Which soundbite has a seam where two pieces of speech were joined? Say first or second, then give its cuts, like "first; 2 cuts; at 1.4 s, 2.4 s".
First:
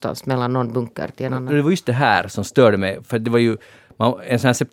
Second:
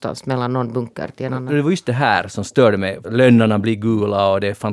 second; 1 cut; at 3.0 s